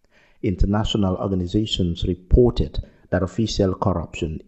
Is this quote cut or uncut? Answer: uncut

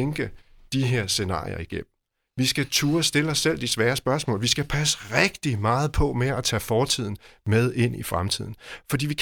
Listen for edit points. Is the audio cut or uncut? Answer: uncut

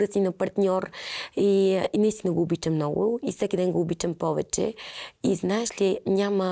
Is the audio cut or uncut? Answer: uncut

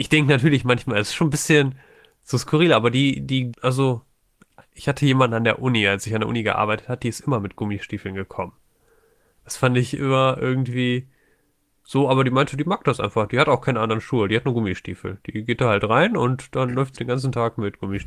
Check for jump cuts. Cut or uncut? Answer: cut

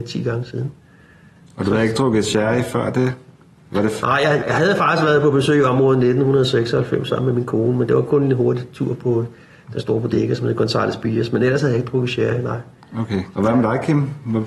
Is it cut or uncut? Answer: cut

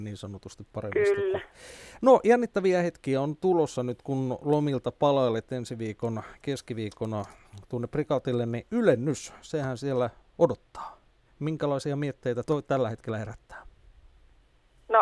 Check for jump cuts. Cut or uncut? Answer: cut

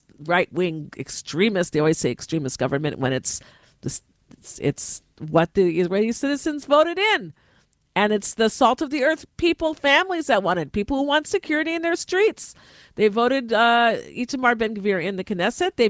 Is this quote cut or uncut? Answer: uncut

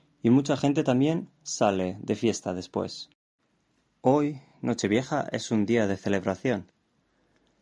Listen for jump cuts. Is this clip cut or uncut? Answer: uncut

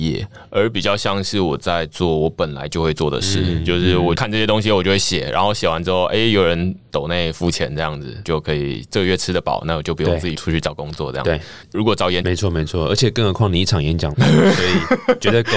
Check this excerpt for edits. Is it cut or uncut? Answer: cut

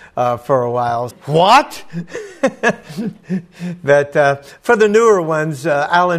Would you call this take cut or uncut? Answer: cut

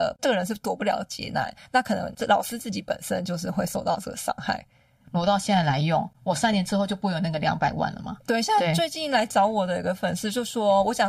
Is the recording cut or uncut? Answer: cut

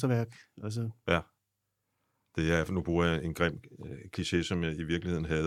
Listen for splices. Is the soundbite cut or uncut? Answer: uncut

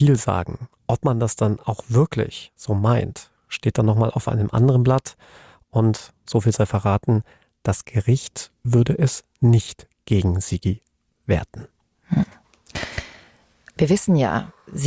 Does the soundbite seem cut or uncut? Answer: uncut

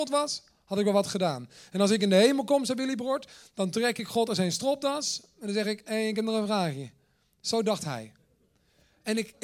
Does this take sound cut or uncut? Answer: uncut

